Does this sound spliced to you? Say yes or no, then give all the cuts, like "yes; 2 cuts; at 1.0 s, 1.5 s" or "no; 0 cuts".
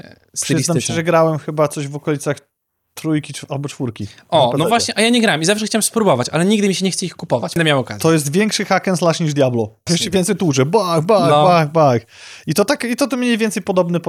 yes; 2 cuts; at 7.6 s, 9.9 s